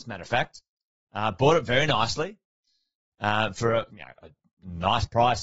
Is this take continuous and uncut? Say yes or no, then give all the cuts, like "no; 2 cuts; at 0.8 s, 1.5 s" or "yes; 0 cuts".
no; 1 cut; at 3.9 s